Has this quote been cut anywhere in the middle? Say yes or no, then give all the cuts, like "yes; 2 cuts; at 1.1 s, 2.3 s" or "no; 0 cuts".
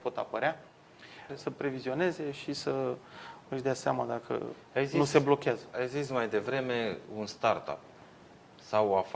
yes; 1 cut; at 1.3 s